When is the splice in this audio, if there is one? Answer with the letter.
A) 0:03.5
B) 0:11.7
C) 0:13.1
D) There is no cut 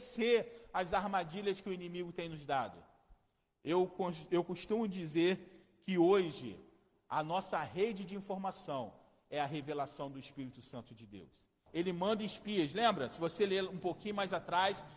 B